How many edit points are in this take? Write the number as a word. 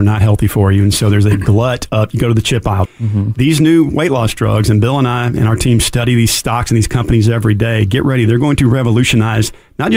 one